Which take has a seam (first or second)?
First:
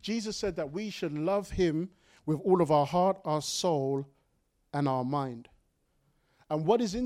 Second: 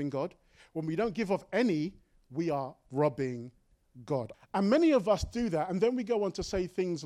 second